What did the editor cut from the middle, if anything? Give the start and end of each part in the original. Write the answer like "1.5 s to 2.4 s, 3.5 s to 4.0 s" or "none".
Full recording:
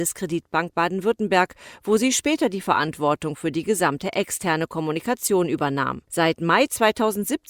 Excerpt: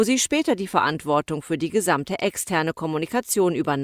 none